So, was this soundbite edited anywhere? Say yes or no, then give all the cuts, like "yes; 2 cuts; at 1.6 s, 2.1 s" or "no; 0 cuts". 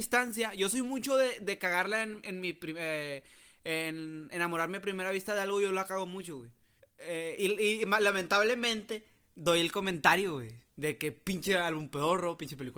yes; 1 cut; at 6.8 s